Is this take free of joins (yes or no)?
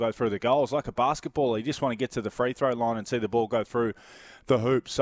yes